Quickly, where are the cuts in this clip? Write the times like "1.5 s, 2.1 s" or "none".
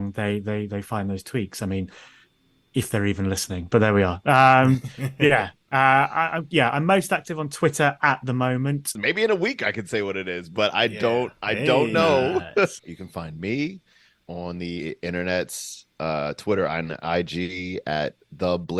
9.0 s, 12.8 s